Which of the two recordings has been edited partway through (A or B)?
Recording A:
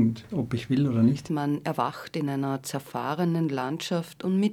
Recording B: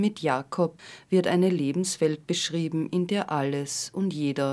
A